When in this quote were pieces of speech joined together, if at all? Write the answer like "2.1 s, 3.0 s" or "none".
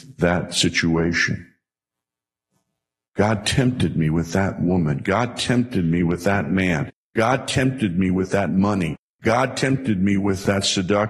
none